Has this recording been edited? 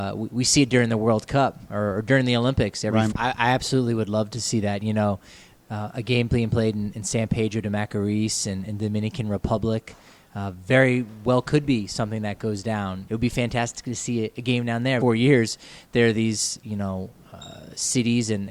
yes; 3 cuts; at 3.1 s, 13.1 s, 15.0 s

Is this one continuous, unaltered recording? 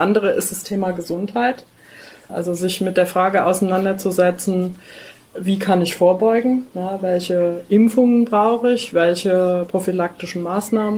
no; 1 cut; at 2.3 s

